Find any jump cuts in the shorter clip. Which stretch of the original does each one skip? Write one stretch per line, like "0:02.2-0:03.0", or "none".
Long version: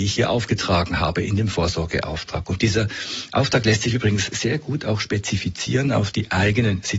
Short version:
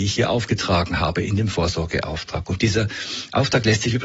none